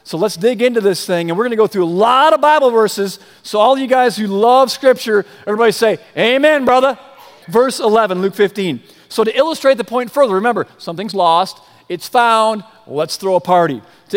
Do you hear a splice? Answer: yes; 1 cut; at 7.4 s

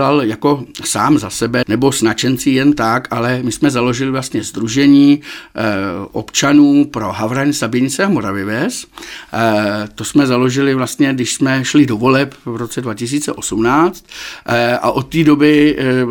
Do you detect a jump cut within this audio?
yes; 1 cut; at 1.6 s

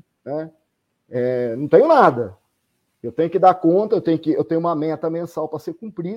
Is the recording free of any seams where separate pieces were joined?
yes; 0 cuts

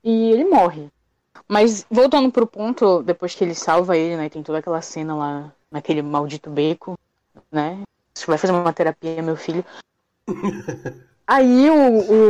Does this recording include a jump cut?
no; 0 cuts

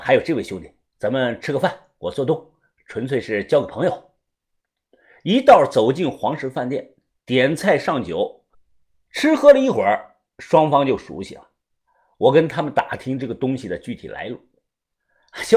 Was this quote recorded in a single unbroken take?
yes; 0 cuts

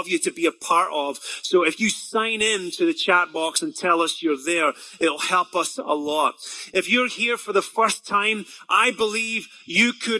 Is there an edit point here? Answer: no; 0 cuts

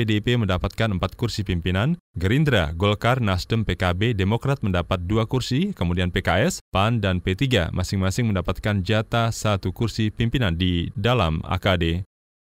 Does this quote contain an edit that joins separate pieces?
no; 0 cuts

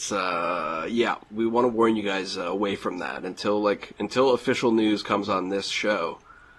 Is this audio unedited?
yes; 0 cuts

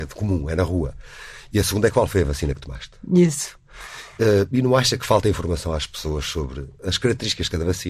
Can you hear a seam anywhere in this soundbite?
no; 0 cuts

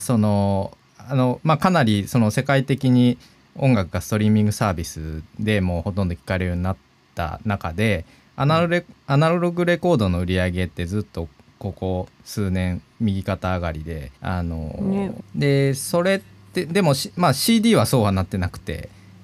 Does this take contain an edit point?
yes; 2 cuts; at 14.2 s, 15.2 s

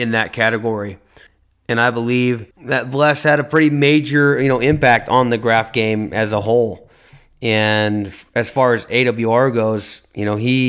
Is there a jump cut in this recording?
yes; 1 cut; at 2.5 s

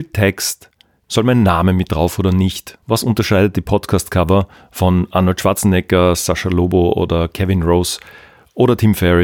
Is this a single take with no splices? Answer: no; 2 cuts; at 1.0 s, 2.8 s

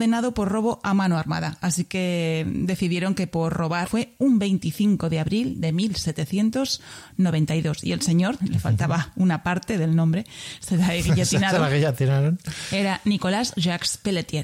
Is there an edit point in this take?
yes; 2 cuts; at 3.9 s, 8.4 s

